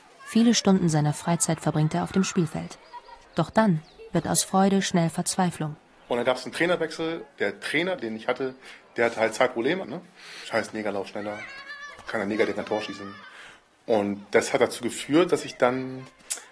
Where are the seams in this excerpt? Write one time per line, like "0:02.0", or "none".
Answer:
0:03.2
0:08.0
0:09.8